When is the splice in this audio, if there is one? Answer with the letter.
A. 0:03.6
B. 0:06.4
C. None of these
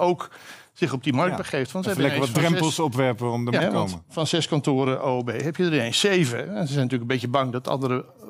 A